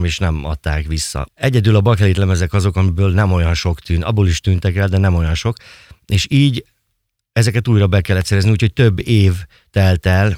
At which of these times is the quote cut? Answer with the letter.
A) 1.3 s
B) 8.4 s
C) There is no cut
A